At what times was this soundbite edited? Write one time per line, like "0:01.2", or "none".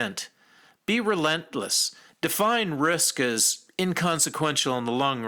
0:02.1